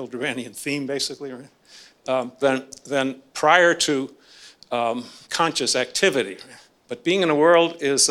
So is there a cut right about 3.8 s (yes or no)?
no